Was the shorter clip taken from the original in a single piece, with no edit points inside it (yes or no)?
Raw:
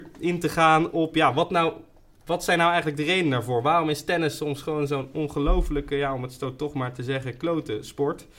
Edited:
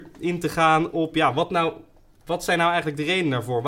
yes